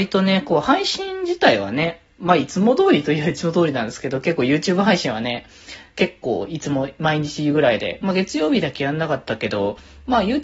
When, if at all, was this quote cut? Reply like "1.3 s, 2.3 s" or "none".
none